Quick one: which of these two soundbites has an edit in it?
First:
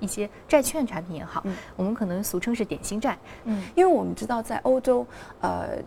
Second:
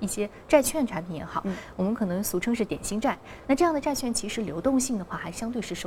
first; 1 cut; at 3.4 s

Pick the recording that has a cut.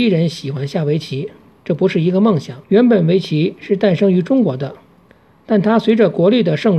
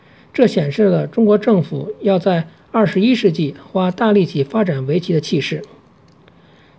first; 1 cut; at 2.6 s

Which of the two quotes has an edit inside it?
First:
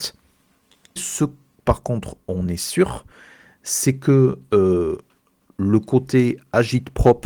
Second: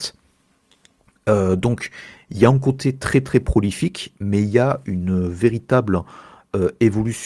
first; 1 cut; at 1.0 s

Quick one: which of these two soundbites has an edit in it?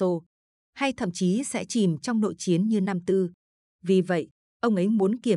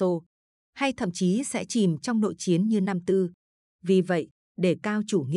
second; 1 cut; at 4.4 s

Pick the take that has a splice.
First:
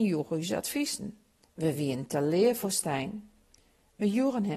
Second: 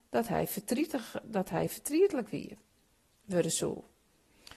first; 1 cut; at 1.4 s

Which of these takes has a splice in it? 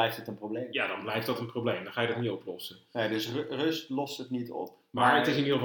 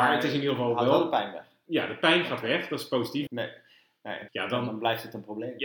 second; 2 cuts; at 3.3 s, 4.3 s

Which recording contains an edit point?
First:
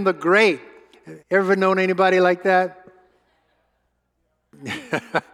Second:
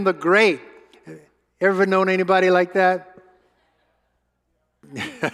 first; 1 cut; at 1.2 s

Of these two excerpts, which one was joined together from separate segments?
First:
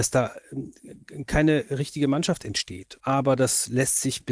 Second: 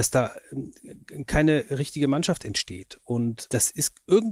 first; 1 cut; at 3.0 s

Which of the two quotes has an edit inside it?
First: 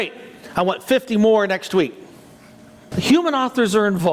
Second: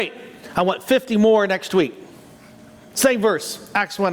first; 1 cut; at 2.9 s

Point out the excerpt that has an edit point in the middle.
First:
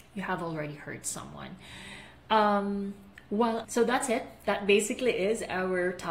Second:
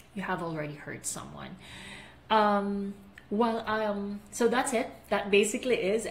first; 1 cut; at 3.6 s

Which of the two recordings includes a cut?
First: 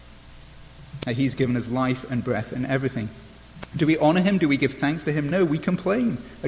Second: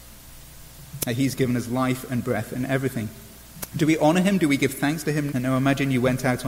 second; 1 cut; at 5.3 s

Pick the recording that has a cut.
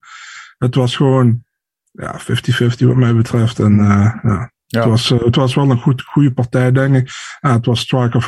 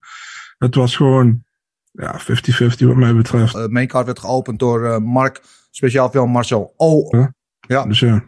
second; 2 cuts; at 3.5 s, 7.1 s

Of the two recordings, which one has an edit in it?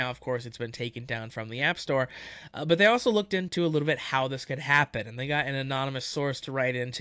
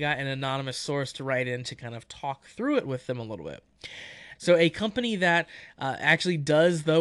second; 1 cut; at 4.4 s

